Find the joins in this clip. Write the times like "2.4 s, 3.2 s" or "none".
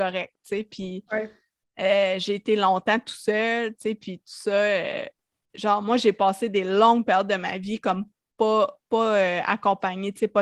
none